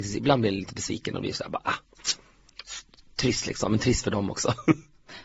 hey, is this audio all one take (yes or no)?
yes